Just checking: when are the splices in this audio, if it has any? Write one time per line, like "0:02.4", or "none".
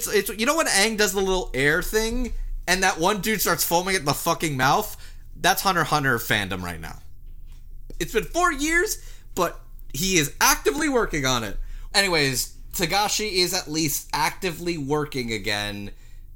0:07.9
0:11.9